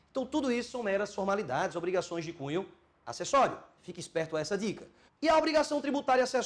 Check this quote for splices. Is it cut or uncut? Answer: cut